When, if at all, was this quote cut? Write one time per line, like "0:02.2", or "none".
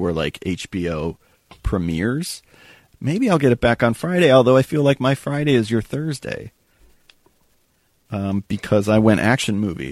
0:02.9